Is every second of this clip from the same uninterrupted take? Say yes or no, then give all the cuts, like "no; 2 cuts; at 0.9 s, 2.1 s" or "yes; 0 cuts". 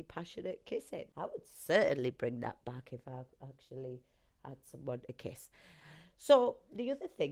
no; 1 cut; at 1.1 s